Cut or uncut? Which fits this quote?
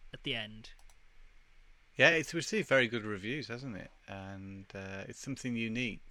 uncut